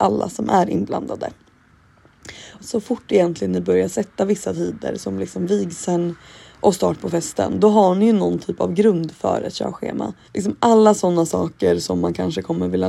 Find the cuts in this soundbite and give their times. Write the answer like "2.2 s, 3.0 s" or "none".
2.6 s, 10.3 s